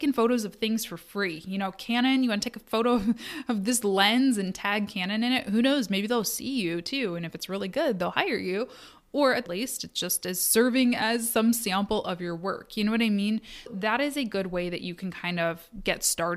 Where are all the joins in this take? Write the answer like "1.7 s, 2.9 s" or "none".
9.5 s, 13.7 s